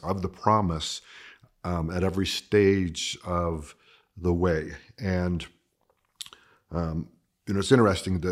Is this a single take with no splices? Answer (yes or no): yes